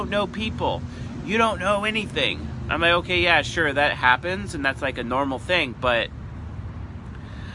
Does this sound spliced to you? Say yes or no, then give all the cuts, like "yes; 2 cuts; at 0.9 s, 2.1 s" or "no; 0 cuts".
no; 0 cuts